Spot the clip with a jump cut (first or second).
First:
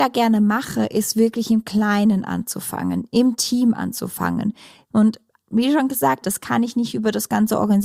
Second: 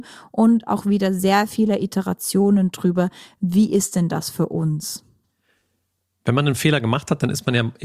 first